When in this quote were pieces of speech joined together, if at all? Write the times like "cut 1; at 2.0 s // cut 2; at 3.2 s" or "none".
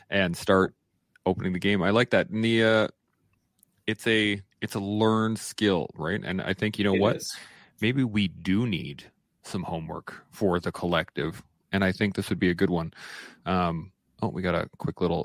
cut 1; at 4.5 s